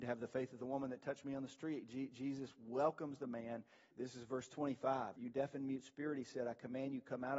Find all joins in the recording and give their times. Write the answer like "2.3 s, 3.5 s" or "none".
3.9 s, 5.2 s